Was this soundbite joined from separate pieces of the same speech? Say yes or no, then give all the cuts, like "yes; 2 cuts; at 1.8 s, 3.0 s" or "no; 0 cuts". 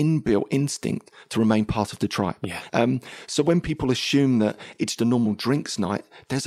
yes; 2 cuts; at 2.7 s, 5.0 s